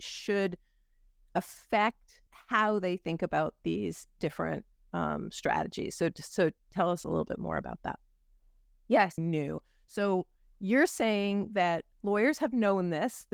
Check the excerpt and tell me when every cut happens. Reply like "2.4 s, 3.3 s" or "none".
9.2 s, 11.9 s